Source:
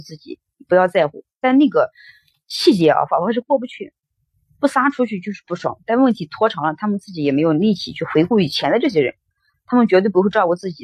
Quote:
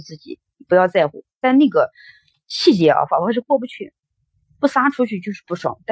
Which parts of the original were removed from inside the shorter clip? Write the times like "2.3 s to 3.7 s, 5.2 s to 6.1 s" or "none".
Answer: none